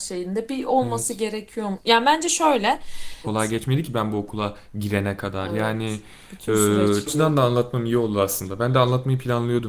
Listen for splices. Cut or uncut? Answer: cut